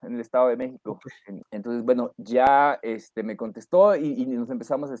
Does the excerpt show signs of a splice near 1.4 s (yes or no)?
yes